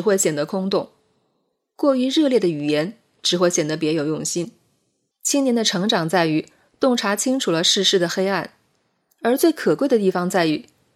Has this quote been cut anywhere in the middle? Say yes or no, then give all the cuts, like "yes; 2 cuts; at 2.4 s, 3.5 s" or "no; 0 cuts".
yes; 1 cut; at 5.1 s